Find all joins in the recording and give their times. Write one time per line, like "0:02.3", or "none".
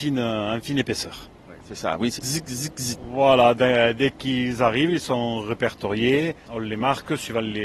0:02.2